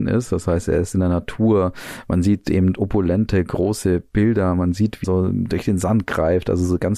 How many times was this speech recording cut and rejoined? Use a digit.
1